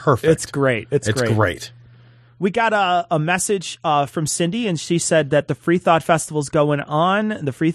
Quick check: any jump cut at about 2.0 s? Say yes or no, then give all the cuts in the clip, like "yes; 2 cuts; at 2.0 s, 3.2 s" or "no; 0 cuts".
no; 0 cuts